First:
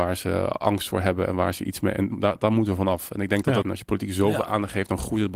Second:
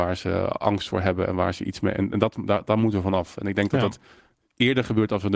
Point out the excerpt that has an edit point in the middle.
first; 2 cuts; at 2.1 s, 3.6 s

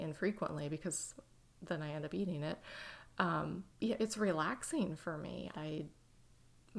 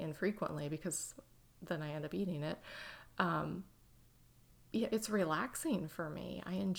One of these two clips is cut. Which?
first; 2 cuts; at 3.7 s, 5.5 s

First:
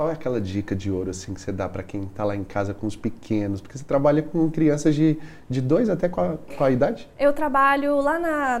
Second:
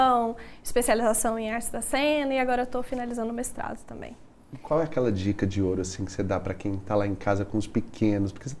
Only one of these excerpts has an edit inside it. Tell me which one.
first; 1 cut; at 6.5 s

